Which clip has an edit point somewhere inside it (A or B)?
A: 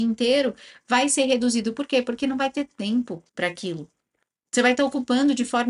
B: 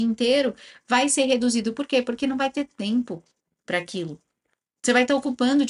A